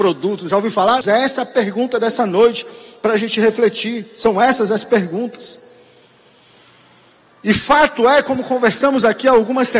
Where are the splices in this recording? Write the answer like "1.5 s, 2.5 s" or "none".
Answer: 1.0 s